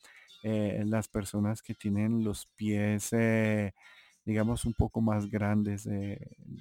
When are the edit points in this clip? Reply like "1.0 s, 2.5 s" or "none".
none